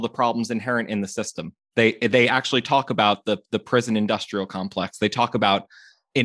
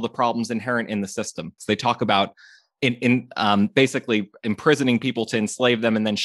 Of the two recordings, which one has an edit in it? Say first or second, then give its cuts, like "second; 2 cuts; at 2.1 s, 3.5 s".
second; 1 cut; at 1.6 s